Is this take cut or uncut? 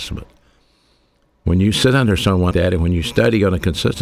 cut